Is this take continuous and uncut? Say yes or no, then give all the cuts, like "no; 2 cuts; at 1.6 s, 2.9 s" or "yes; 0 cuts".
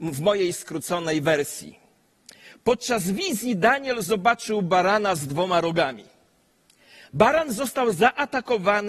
yes; 0 cuts